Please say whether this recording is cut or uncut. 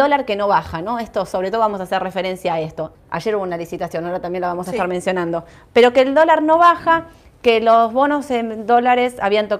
cut